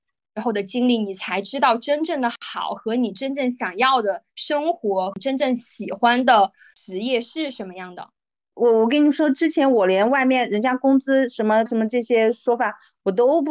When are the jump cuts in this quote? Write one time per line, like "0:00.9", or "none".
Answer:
0:08.5
0:11.7